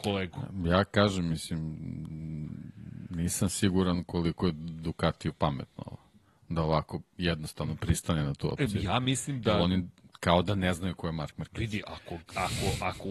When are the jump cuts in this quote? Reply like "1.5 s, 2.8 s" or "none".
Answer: none

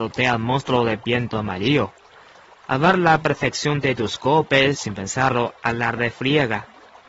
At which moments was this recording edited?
4.7 s

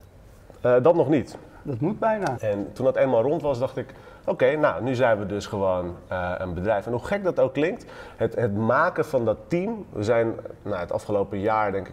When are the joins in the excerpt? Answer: 2.3 s

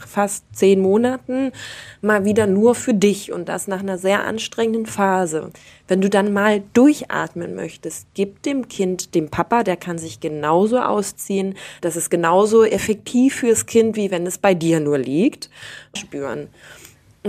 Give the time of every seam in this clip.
11.8 s, 16.0 s

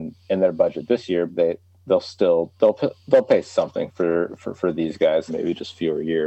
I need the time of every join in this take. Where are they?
1.3 s, 5.3 s

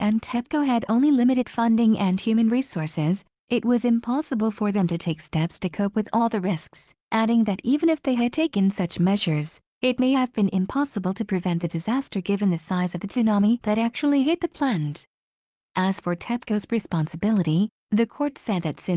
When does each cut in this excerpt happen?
7.0 s

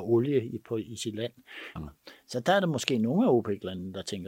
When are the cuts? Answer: 1.8 s

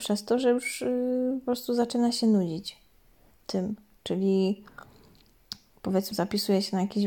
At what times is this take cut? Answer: 3.9 s, 6.1 s

